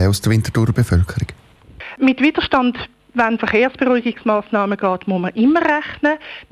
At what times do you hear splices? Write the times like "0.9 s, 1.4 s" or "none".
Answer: 3.4 s